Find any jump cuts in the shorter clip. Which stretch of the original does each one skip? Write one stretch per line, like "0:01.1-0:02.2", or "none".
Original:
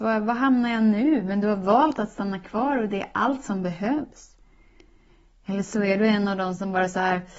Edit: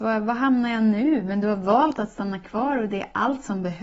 none